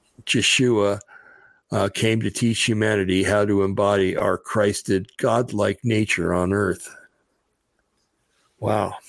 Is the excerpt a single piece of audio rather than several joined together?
yes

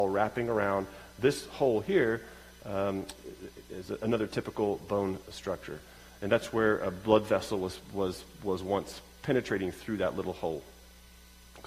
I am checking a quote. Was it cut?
yes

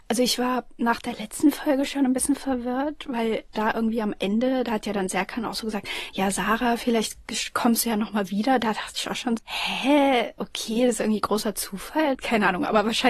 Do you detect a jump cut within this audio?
yes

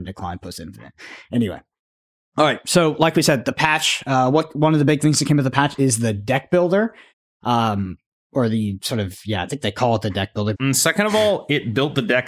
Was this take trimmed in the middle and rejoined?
yes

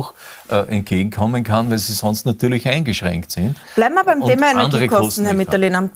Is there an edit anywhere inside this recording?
no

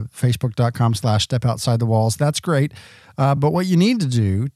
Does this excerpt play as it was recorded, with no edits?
yes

